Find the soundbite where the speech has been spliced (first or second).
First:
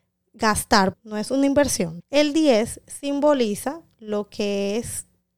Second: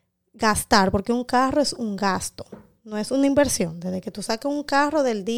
first